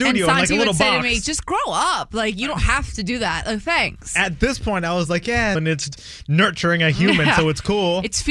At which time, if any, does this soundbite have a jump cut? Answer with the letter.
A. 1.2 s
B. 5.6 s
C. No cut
B